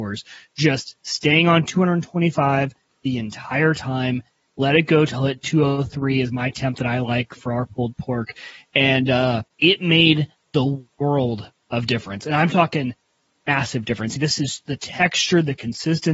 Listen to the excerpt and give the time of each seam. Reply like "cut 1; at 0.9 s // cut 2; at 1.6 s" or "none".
cut 1; at 9.5 s // cut 2; at 14.2 s